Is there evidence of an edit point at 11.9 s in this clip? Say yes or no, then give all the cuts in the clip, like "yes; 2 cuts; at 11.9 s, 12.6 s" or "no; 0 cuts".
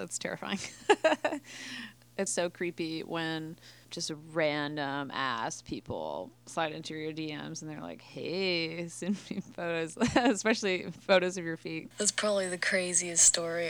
yes; 2 cuts; at 2.3 s, 11.9 s